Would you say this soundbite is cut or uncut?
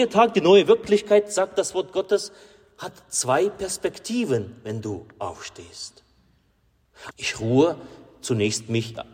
cut